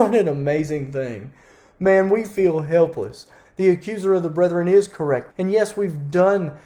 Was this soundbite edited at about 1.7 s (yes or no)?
no